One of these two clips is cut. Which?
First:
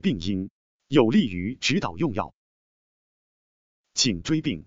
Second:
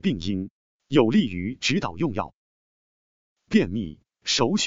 second; 1 cut; at 3.3 s

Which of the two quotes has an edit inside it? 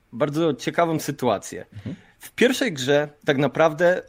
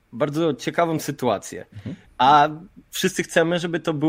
second; 1 cut; at 2.0 s

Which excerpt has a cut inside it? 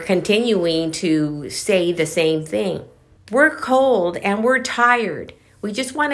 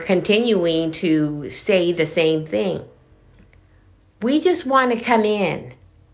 first; 1 cut; at 3.2 s

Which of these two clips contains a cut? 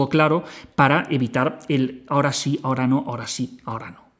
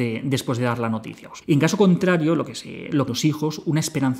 second; 2 cuts; at 1.4 s, 3.1 s

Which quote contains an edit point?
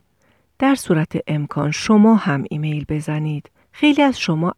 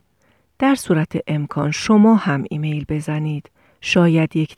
first; 1 cut; at 3.6 s

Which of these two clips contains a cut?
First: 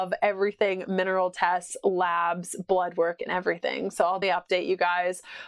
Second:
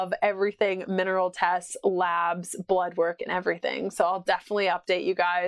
first; 1 cut; at 4.2 s

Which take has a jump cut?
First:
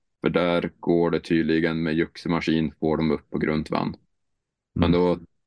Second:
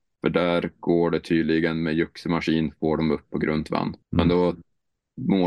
second; 1 cut; at 4.0 s

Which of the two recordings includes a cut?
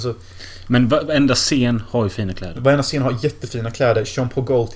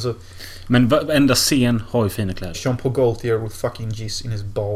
second; 1 cut; at 2.5 s

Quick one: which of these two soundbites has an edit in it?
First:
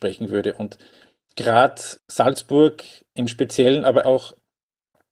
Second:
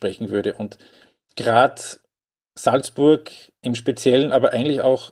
first; 2 cuts; at 2.0 s, 4.0 s

